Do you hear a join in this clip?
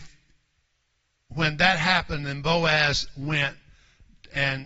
no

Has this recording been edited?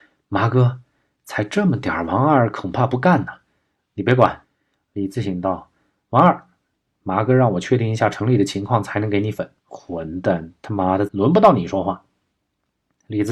yes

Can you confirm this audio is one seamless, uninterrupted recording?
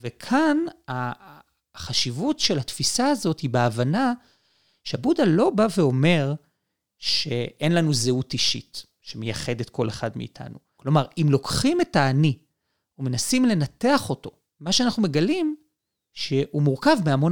no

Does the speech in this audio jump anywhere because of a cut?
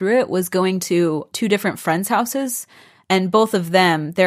no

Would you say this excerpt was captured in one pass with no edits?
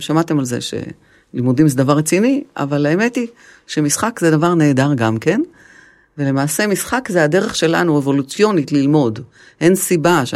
yes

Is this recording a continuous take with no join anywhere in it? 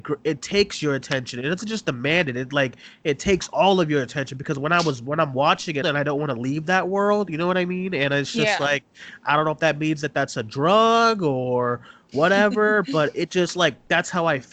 no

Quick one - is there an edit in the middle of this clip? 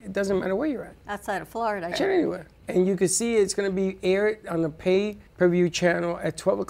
yes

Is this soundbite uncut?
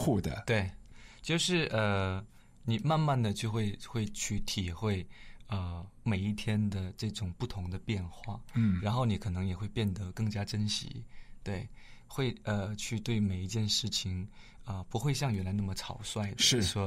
yes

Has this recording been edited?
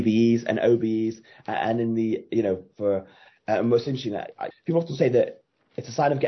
yes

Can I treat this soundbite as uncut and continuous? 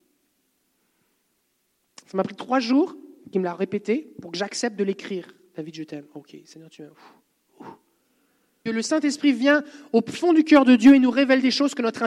no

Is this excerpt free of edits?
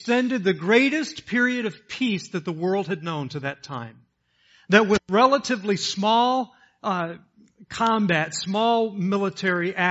yes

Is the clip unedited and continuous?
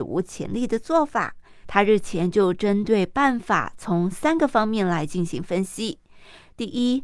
no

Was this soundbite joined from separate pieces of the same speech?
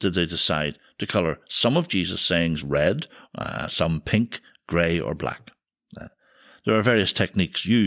no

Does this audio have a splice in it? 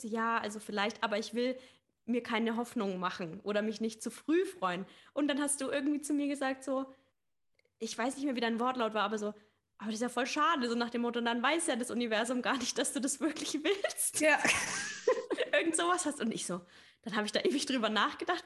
no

